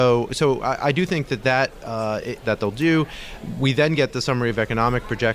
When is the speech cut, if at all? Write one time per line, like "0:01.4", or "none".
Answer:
0:02.4